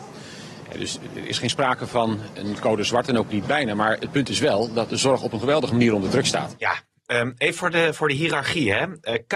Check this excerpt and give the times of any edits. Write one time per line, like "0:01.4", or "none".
0:07.9